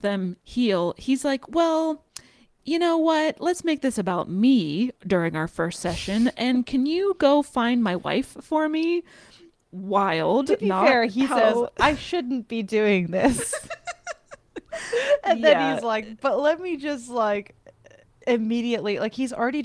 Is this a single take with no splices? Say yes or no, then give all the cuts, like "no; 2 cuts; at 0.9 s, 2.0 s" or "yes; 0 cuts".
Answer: yes; 0 cuts